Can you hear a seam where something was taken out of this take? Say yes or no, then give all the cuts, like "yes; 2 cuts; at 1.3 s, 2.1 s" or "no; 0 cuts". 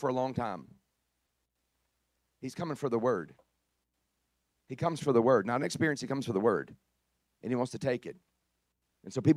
no; 0 cuts